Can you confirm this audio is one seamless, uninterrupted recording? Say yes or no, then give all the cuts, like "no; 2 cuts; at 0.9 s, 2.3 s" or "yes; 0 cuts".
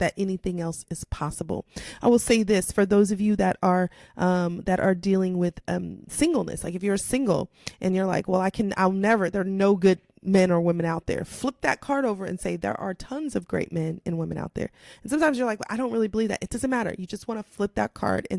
yes; 0 cuts